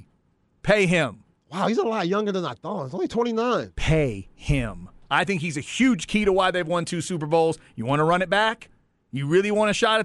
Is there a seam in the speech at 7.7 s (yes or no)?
no